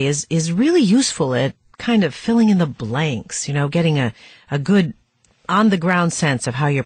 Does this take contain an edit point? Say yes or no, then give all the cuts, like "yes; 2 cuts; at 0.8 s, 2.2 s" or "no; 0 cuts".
no; 0 cuts